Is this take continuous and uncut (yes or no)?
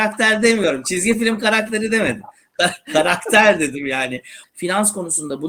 no